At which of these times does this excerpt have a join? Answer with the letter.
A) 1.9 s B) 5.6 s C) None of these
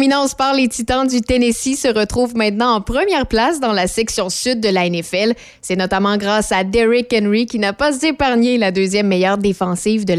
C